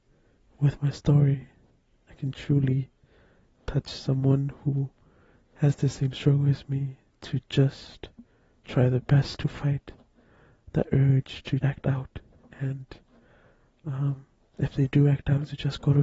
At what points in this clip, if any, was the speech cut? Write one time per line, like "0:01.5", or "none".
0:11.6